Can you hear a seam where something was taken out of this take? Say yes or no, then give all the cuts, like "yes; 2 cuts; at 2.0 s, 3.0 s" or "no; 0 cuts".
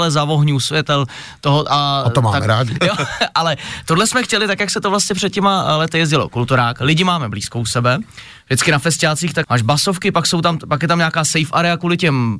yes; 2 cuts; at 2.8 s, 9.4 s